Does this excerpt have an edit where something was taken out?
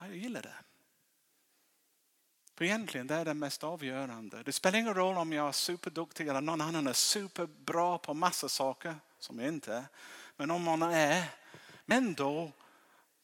no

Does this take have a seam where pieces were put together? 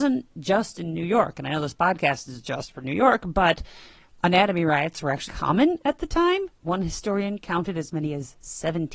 yes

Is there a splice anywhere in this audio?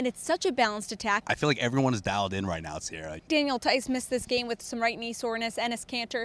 yes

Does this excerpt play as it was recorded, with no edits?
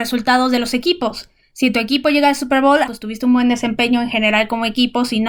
no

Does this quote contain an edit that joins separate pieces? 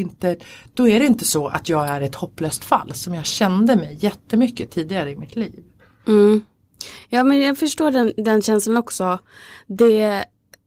no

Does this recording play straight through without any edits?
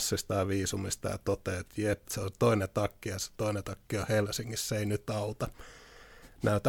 no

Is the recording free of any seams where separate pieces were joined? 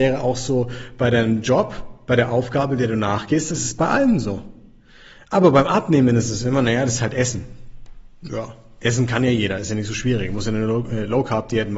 yes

